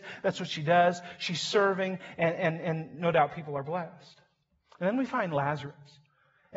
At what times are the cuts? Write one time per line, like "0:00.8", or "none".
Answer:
none